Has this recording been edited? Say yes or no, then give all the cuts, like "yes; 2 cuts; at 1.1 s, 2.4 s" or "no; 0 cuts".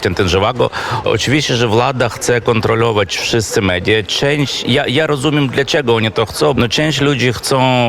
yes; 2 cuts; at 1.0 s, 6.5 s